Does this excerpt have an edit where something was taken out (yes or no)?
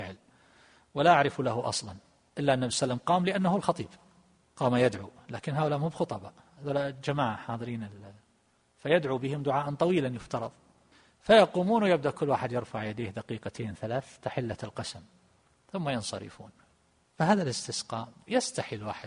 no